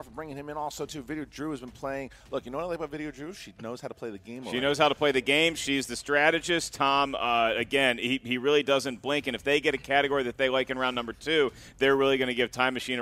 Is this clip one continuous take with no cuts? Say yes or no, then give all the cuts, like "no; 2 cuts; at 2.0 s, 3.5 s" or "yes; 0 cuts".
yes; 0 cuts